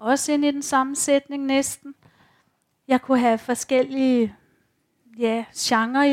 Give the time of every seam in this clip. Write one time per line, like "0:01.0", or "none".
none